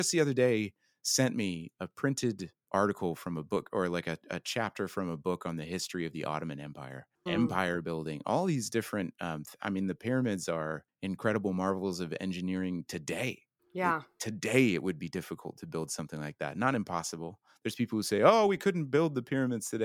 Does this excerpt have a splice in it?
yes; 1 cut; at 7.3 s

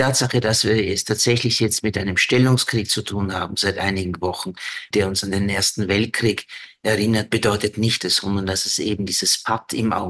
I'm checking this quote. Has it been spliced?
yes; 2 cuts; at 4.9 s, 8.0 s

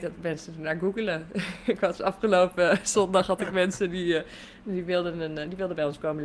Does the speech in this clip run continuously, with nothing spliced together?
yes; 0 cuts

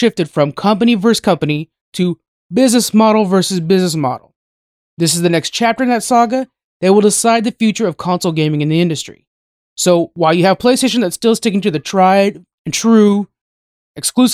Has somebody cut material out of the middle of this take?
no; 0 cuts

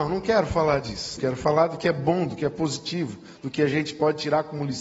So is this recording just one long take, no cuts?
no; 1 cut; at 1.2 s

